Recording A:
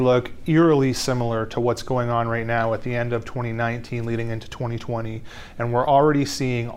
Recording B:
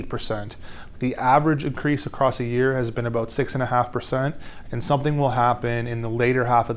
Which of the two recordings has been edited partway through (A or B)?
B